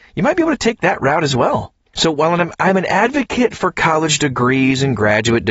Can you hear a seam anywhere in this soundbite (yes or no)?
yes